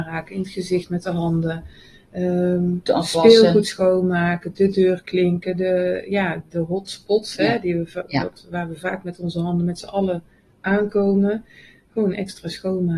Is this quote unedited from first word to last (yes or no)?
no